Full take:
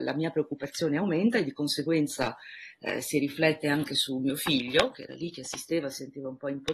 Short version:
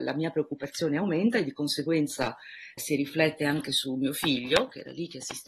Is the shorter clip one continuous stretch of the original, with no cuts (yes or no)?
no